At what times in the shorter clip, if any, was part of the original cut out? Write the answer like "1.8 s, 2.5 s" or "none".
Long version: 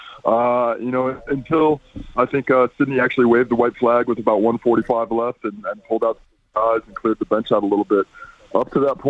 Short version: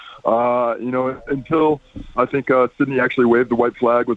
none